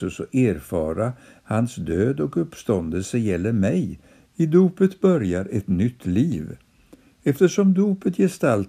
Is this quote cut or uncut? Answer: cut